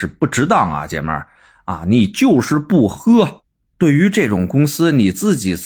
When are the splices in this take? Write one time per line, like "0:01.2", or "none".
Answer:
none